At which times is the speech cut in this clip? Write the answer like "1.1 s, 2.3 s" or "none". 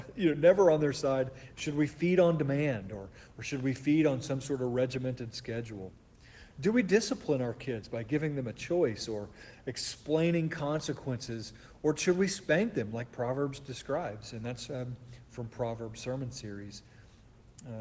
1.5 s, 15.3 s